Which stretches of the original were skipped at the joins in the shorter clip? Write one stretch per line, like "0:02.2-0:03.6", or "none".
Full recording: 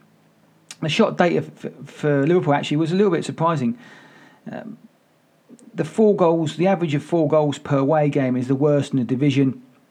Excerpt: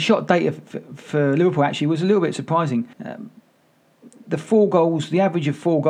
0:03.8-0:04.4